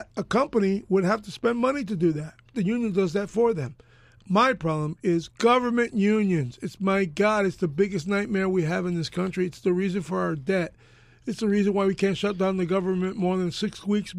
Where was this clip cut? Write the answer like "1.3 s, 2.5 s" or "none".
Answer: 2.5 s